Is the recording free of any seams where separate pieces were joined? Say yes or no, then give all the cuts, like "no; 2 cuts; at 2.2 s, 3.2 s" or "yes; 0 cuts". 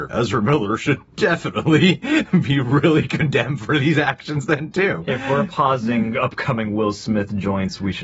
yes; 0 cuts